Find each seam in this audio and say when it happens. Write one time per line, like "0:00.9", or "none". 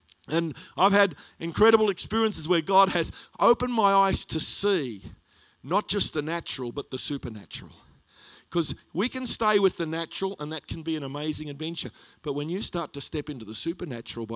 none